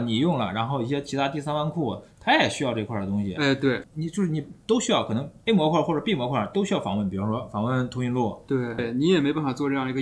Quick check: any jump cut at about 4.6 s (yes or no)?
yes